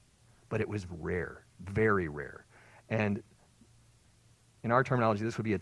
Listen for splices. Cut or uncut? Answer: uncut